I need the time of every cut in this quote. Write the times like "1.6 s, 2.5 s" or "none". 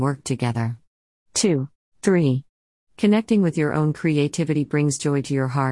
1.8 s

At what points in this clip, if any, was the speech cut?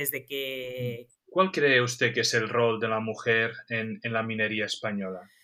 1.1 s

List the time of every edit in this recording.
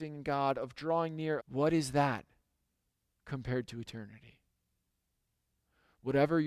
1.4 s

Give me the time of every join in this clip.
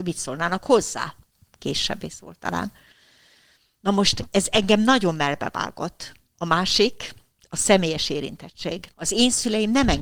3.8 s, 8.9 s

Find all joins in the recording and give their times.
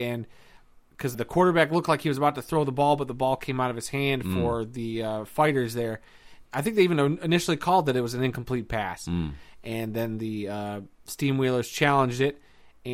1.1 s, 6.5 s

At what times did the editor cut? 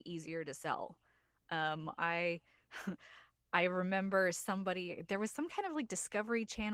none

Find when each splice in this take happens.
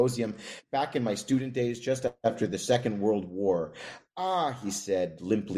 none

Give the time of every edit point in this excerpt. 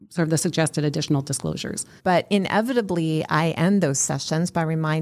2.0 s

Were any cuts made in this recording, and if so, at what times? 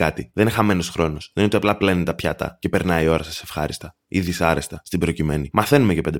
none

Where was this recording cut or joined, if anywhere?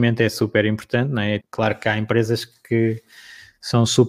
1.4 s

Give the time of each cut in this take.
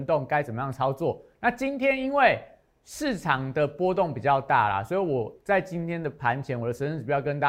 none

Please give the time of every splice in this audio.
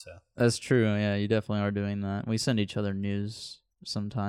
none

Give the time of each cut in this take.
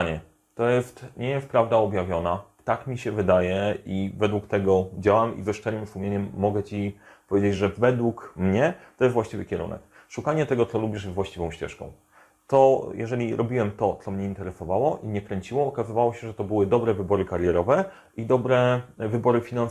none

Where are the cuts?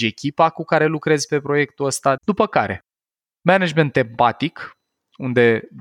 2.2 s

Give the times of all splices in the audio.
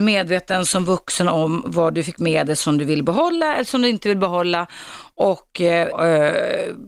5.9 s

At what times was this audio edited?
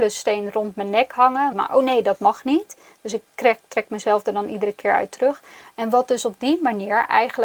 1.5 s

